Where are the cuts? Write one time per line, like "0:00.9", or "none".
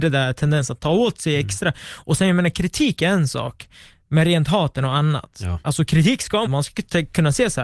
0:06.5